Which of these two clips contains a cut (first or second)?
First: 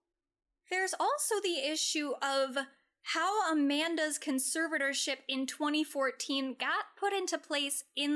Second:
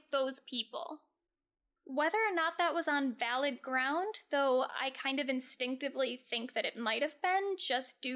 second